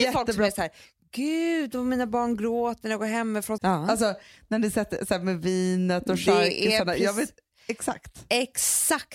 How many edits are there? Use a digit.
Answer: 1